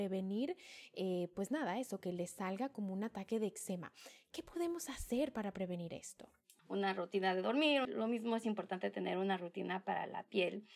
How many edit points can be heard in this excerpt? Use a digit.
2